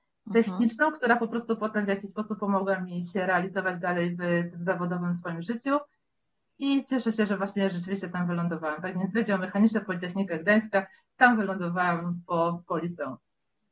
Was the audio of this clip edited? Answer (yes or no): no